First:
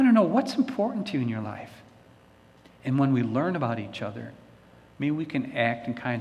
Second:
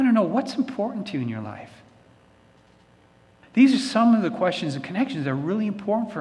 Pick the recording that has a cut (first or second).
first